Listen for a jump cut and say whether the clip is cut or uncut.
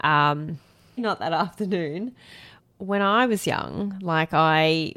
cut